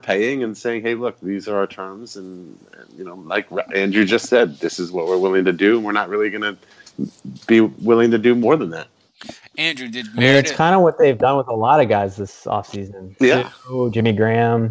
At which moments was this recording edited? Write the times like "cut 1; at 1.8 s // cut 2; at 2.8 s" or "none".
none